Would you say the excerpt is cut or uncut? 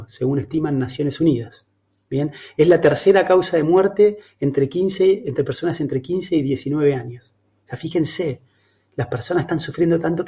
uncut